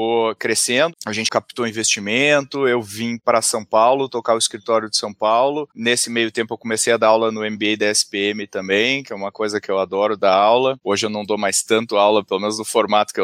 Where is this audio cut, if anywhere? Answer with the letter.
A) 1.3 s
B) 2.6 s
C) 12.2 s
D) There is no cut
A